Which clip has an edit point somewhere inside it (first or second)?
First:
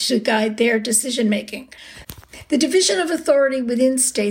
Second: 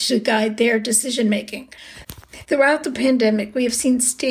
second